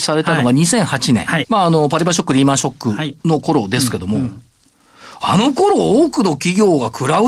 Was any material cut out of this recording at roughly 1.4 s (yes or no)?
yes